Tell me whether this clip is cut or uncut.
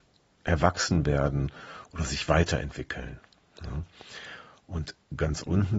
uncut